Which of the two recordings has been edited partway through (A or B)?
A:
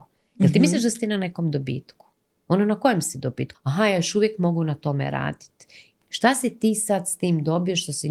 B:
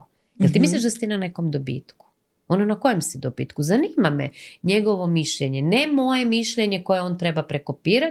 A